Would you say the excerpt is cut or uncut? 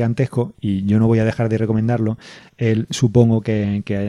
cut